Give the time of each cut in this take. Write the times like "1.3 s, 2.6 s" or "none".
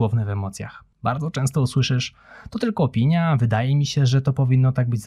0.9 s